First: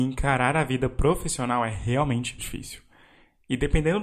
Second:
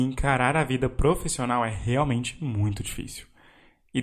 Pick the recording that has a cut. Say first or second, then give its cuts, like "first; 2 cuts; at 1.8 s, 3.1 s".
first; 1 cut; at 2.4 s